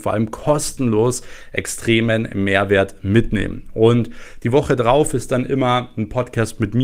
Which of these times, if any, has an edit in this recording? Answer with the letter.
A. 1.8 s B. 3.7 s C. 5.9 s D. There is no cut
D